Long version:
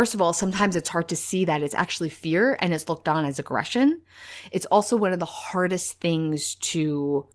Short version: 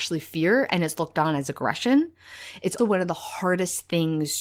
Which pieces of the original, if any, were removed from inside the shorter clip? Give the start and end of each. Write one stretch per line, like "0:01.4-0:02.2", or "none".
0:04.7-0:04.9